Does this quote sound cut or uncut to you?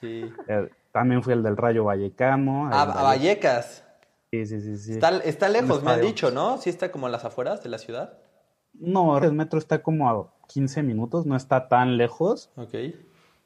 cut